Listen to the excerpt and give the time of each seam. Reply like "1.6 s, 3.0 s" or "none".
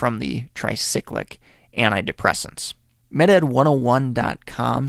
3.0 s